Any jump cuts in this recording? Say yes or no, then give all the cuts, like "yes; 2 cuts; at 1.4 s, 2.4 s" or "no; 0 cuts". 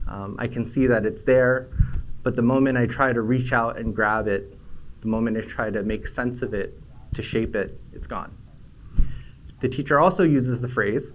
yes; 1 cut; at 9.5 s